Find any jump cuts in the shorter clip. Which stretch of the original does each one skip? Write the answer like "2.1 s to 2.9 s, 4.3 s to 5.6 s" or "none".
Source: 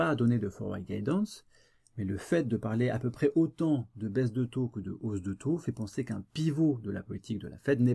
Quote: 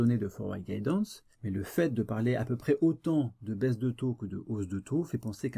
1.5 s to 1.9 s